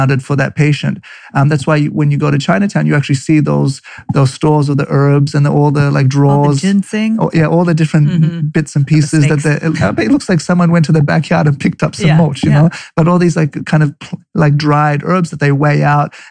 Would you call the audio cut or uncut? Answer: uncut